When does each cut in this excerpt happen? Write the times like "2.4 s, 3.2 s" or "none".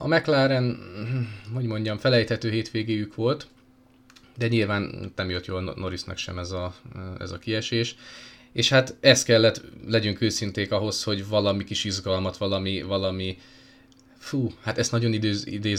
none